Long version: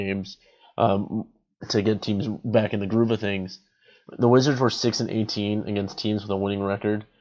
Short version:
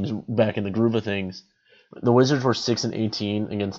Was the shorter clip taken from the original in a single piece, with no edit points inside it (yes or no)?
yes